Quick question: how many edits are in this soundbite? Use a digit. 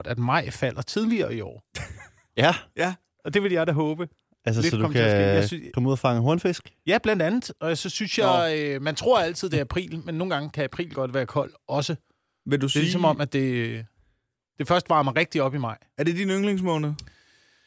0